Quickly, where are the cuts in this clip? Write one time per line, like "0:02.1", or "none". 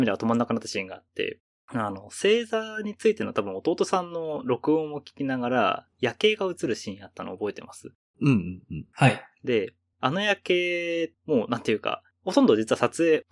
none